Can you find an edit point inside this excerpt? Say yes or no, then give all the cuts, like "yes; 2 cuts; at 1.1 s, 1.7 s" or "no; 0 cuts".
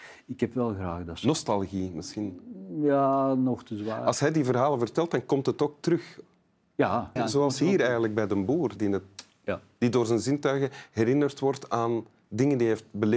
yes; 2 cuts; at 7.2 s, 8.8 s